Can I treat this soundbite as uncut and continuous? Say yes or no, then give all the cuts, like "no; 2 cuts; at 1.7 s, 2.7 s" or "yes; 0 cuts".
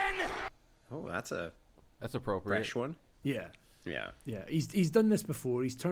no; 1 cut; at 3.2 s